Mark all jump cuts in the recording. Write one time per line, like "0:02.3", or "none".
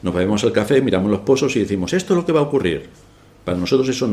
none